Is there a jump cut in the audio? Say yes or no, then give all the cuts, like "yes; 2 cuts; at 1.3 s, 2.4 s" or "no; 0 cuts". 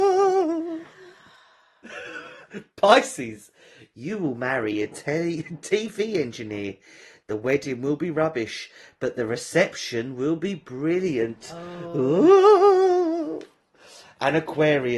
no; 0 cuts